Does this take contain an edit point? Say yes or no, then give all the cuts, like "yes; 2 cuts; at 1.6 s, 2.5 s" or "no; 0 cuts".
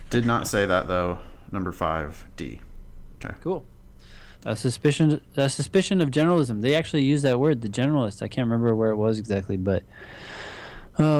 yes; 2 cuts; at 3.2 s, 4.3 s